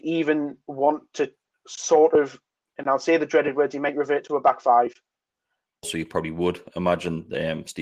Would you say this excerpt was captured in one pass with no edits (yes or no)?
no